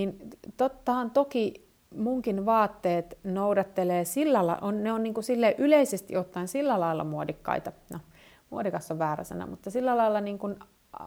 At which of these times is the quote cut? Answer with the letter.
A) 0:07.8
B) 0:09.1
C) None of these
C